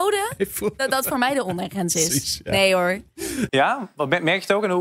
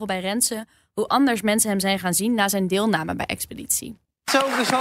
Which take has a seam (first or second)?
first